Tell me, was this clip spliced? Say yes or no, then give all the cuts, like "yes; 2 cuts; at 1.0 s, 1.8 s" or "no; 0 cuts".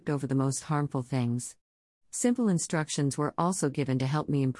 no; 0 cuts